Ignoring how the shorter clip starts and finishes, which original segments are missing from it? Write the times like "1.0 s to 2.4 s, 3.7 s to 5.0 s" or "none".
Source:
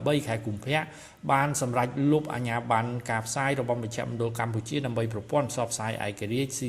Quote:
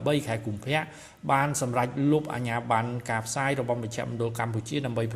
none